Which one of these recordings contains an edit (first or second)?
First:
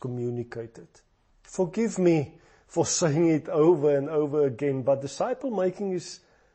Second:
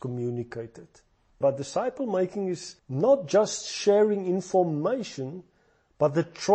second